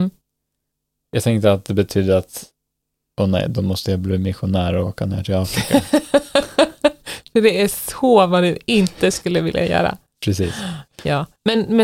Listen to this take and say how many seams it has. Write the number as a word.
one